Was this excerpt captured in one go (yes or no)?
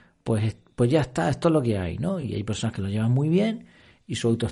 yes